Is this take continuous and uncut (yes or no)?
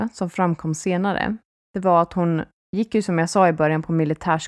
yes